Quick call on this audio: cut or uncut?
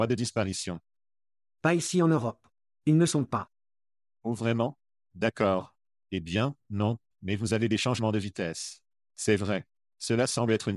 cut